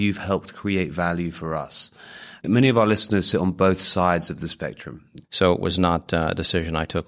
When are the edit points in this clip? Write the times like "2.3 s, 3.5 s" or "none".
5.2 s